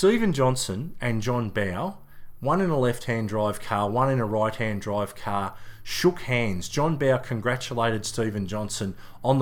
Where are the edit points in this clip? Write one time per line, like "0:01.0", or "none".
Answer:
none